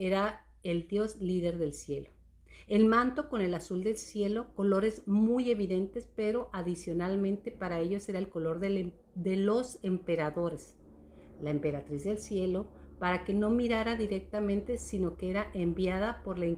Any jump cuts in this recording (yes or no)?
no